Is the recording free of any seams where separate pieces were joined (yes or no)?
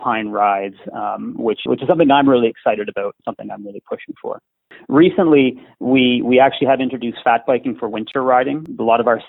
no